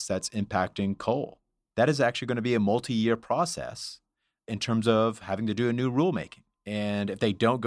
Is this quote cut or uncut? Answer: cut